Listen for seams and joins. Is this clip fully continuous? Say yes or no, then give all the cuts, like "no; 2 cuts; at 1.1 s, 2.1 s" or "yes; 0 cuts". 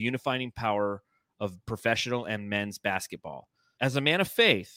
no; 1 cut; at 3.8 s